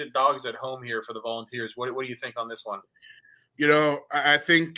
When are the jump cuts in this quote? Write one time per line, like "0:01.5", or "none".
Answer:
none